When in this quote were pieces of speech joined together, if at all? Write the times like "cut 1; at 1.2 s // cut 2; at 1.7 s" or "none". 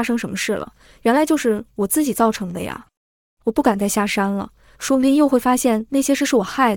none